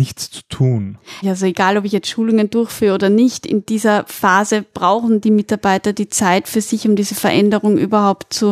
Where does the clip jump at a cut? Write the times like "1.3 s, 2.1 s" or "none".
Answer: 1.2 s